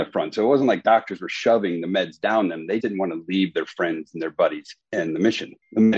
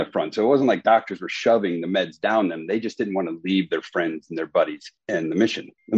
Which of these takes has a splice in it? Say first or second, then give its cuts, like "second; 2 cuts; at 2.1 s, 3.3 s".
first; 1 cut; at 2.8 s